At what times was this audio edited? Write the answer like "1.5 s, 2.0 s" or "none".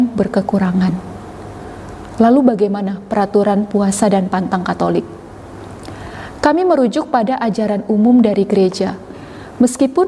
none